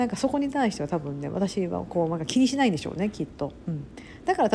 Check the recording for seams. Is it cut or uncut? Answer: uncut